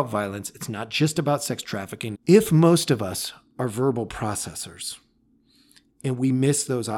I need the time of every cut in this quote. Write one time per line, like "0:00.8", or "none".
0:02.1